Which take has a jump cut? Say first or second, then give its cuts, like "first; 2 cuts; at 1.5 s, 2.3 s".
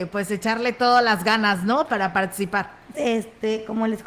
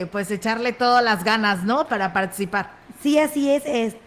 first; 1 cut; at 2.9 s